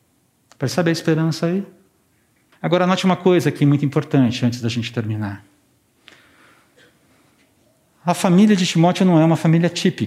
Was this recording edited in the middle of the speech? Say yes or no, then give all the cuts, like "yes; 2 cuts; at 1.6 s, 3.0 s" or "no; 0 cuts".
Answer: yes; 1 cut; at 2.5 s